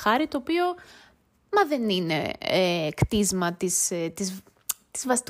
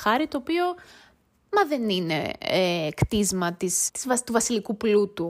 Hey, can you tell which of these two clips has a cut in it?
second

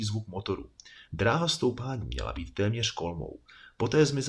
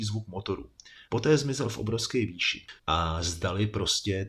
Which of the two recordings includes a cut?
second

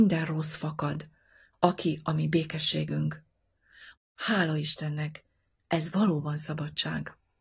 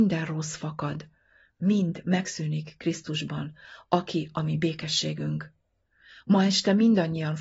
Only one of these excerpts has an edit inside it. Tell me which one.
first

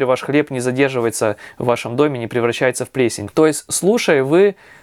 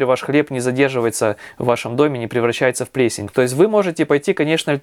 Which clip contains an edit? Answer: second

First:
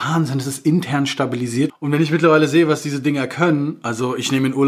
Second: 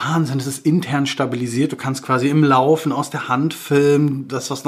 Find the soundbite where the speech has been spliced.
first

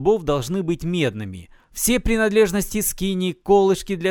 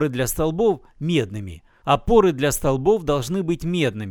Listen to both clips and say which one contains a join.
second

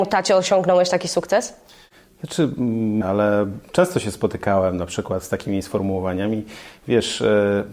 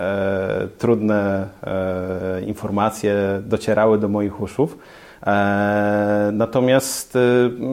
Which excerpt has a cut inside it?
first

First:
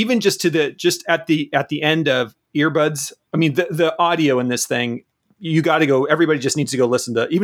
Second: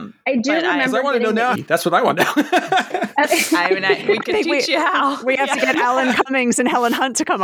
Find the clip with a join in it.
second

